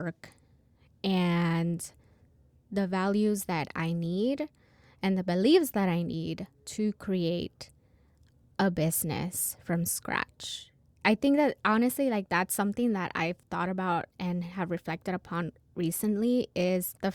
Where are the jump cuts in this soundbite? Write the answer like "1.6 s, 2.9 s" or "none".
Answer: none